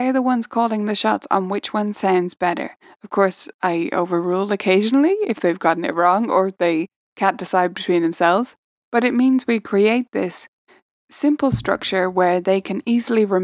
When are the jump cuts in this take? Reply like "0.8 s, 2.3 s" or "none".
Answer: none